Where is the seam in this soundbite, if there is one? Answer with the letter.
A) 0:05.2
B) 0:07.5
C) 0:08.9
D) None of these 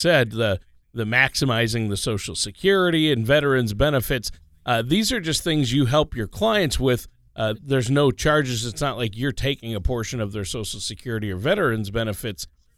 B